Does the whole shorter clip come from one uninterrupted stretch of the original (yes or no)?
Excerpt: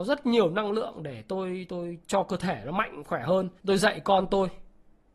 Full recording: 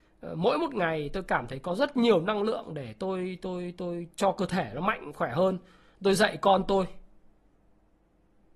no